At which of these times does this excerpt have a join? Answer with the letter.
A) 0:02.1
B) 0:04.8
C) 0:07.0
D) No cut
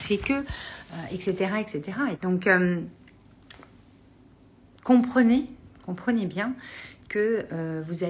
A